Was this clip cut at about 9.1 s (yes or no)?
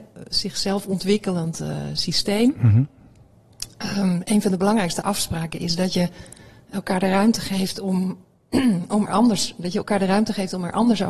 yes